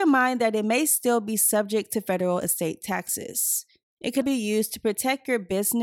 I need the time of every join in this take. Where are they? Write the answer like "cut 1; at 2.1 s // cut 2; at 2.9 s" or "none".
cut 1; at 4.2 s